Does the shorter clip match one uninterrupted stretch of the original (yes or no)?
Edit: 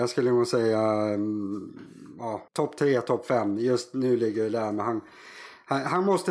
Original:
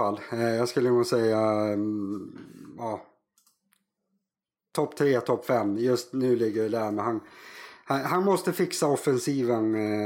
no